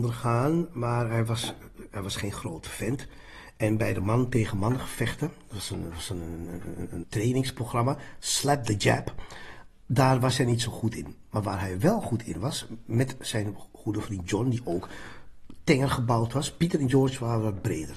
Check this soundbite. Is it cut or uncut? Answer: cut